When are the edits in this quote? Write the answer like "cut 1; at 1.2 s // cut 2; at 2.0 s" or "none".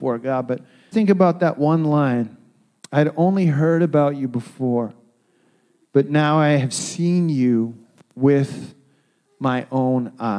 cut 1; at 0.9 s